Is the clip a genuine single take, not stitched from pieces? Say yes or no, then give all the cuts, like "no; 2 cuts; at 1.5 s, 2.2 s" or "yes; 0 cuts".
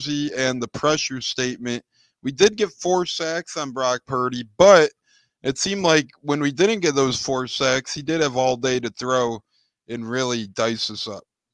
yes; 0 cuts